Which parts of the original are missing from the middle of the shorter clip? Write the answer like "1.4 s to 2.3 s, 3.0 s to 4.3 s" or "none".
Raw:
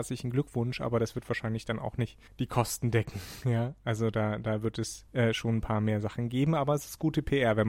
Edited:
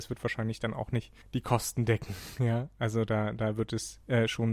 none